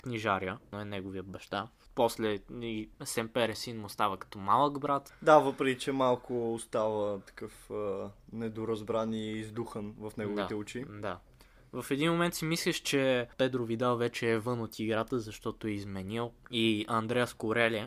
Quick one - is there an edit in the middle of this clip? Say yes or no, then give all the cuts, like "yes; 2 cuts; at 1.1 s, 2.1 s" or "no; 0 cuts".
no; 0 cuts